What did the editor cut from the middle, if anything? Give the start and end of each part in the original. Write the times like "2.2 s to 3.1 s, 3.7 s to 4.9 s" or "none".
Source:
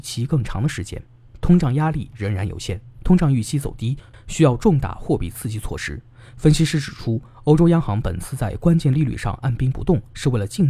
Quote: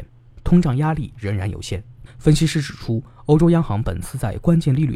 3.0 s to 6.2 s